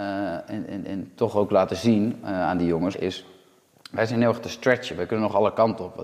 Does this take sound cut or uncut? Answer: cut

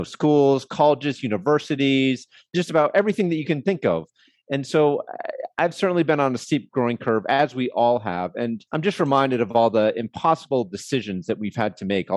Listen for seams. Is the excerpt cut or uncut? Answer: cut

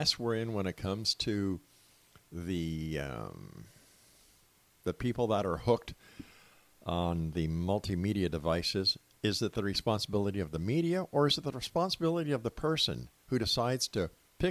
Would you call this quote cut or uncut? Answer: uncut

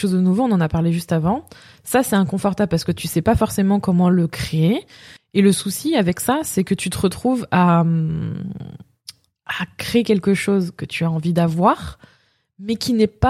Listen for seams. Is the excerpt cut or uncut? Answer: cut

